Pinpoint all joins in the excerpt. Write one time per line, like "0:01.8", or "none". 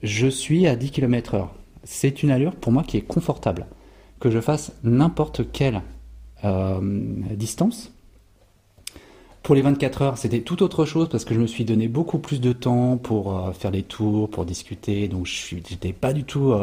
none

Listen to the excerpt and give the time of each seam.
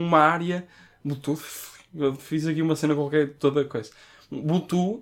none

